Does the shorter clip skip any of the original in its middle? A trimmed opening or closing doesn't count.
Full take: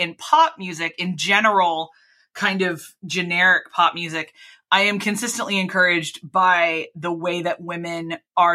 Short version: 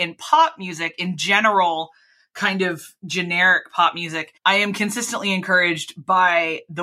yes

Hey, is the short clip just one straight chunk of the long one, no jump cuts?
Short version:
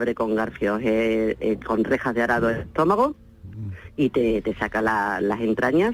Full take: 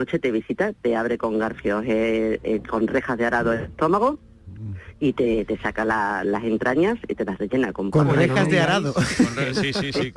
yes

